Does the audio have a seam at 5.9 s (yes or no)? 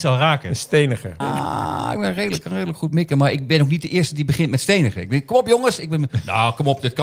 no